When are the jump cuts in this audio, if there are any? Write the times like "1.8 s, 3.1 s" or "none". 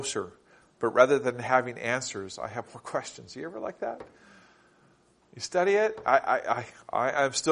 none